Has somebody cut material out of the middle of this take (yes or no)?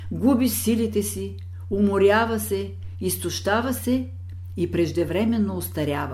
no